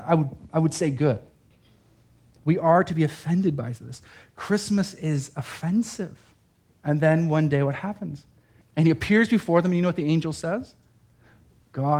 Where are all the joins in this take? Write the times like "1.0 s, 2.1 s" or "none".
6.8 s, 8.6 s